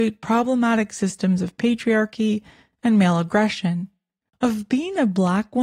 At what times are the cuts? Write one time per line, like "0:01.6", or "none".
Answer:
0:04.3